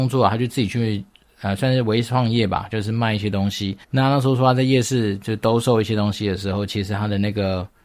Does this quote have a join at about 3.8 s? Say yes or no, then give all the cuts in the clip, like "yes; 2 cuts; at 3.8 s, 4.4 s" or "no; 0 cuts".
yes; 1 cut; at 3.8 s